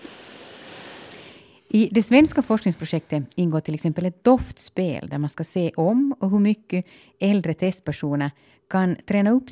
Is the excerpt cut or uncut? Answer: uncut